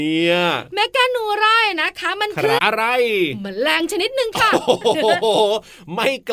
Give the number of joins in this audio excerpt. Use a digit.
1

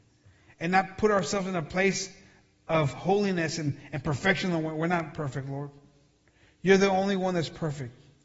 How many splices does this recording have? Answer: 0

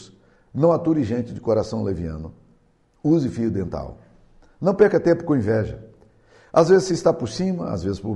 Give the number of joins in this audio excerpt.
0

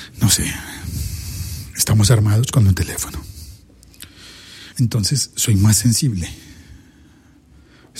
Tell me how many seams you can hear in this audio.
1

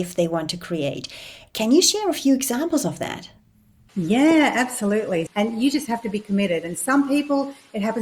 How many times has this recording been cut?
1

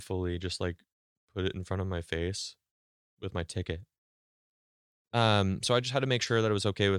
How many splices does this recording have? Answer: 1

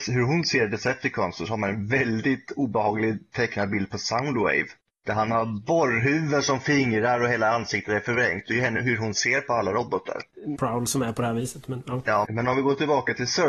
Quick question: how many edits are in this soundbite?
2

